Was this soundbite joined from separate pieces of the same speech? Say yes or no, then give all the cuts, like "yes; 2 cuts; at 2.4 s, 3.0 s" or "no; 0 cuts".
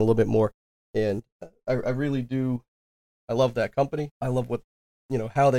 no; 0 cuts